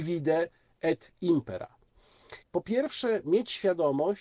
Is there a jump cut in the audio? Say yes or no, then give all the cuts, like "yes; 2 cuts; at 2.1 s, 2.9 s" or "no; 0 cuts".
yes; 1 cut; at 2.4 s